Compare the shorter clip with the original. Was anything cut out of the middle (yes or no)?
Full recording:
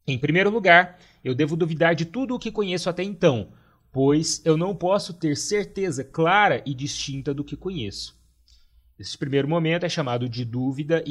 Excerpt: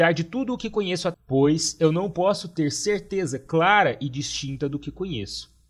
yes